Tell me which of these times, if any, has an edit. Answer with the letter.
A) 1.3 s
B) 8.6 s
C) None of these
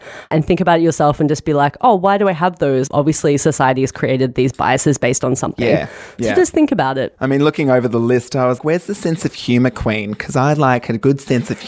B